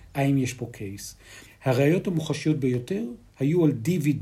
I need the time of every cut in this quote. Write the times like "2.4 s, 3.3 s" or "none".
1.5 s